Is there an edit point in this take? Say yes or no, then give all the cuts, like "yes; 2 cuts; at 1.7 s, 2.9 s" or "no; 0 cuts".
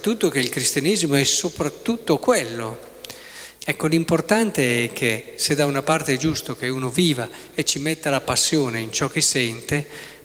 yes; 1 cut; at 3.6 s